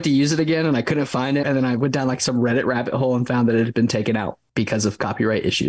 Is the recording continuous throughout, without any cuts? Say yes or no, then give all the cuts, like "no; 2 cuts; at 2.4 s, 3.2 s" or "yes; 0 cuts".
no; 1 cut; at 1.4 s